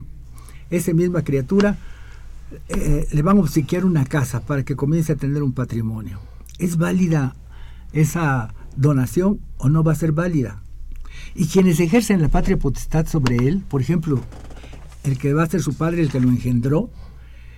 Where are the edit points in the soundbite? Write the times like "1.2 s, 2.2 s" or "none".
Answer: none